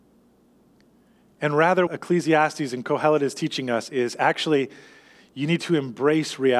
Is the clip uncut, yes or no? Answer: no